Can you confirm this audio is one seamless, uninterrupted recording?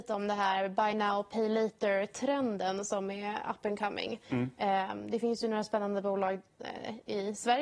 yes; 0 cuts

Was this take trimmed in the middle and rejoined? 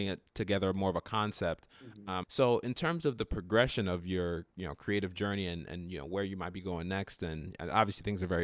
yes; 1 cut; at 2.2 s

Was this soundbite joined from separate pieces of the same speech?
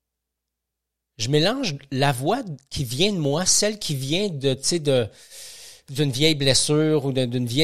no; 0 cuts

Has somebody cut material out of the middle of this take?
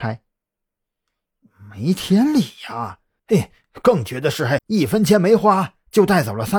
yes; 2 cuts; at 3.2 s, 4.6 s

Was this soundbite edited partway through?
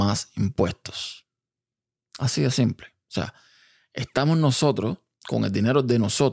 no; 0 cuts

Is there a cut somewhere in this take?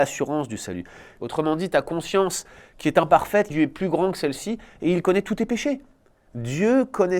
yes; 2 cuts; at 1.2 s, 3.5 s

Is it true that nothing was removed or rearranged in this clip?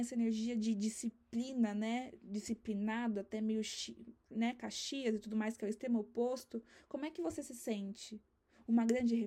yes; 0 cuts

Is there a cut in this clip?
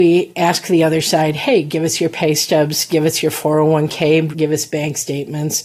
yes; 1 cut; at 4.3 s

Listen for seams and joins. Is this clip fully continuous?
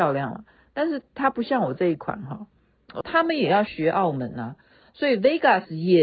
no; 1 cut; at 3.0 s

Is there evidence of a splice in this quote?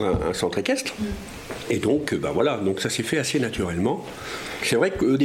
no; 0 cuts

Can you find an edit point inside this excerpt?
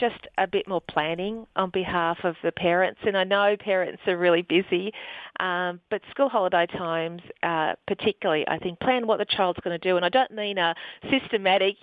yes; 1 cut; at 8.8 s

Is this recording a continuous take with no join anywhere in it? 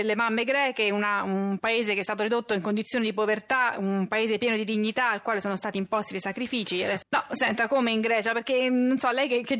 no; 1 cut; at 7.0 s

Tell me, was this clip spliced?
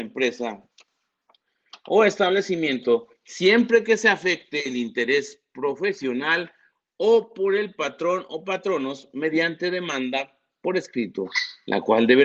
no; 0 cuts

